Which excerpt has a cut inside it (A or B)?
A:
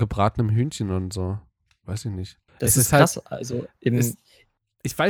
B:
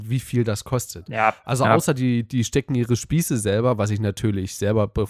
A